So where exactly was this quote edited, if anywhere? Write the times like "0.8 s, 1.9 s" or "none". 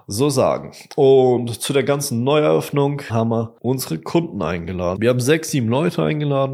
3.1 s, 5.0 s